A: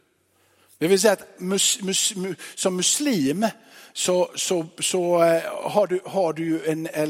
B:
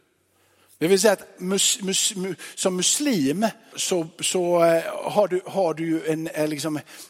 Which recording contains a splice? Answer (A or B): B